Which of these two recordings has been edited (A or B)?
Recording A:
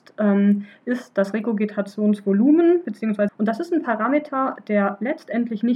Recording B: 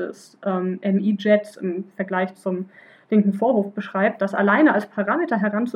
A